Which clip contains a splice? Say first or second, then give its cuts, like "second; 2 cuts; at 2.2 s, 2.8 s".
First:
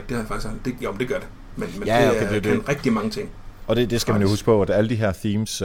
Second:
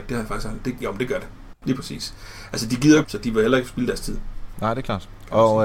second; 2 cuts; at 1.5 s, 3.0 s